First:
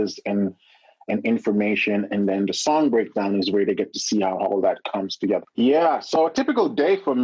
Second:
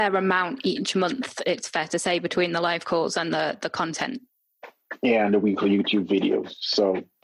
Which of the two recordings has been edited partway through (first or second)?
first